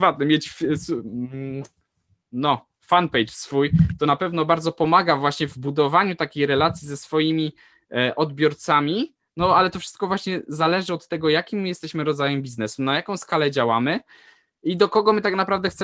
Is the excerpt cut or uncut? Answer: uncut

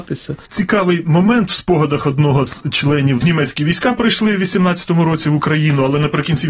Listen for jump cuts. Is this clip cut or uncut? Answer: cut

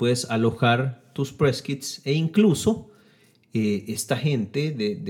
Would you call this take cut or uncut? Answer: uncut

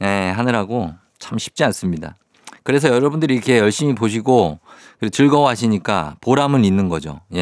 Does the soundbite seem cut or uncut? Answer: uncut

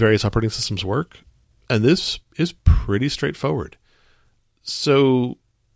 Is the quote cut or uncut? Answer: uncut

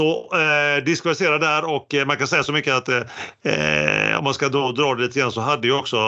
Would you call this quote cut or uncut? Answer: uncut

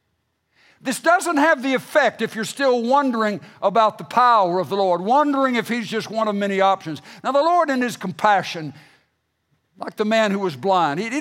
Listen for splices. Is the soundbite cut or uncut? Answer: uncut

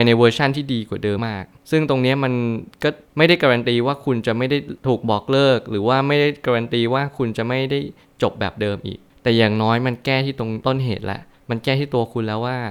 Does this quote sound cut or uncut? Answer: cut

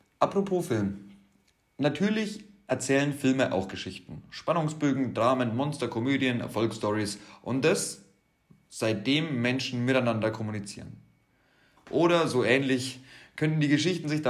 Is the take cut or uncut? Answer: cut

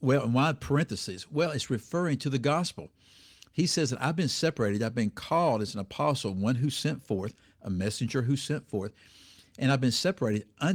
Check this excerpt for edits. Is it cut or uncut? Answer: uncut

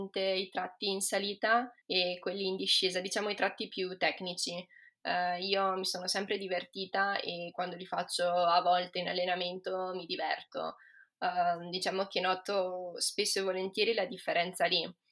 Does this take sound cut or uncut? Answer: cut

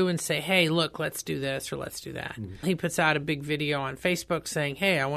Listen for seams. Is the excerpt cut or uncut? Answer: cut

